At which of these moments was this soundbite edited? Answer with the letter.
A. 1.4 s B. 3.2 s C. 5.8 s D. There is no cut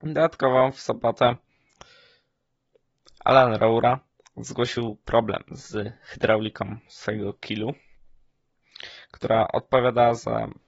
D